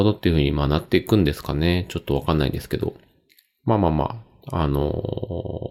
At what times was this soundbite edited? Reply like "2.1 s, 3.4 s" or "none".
none